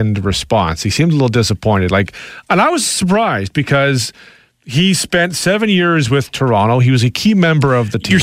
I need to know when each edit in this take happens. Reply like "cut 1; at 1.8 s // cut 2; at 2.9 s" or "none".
none